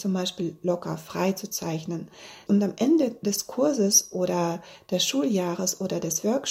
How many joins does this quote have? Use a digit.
1